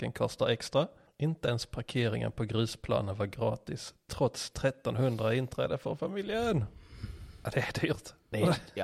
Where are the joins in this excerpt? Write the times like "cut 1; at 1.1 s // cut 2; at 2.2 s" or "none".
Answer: cut 1; at 1.1 s